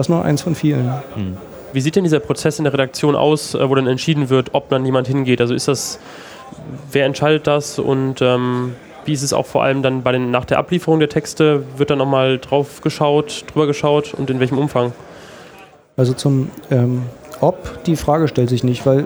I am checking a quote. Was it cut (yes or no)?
no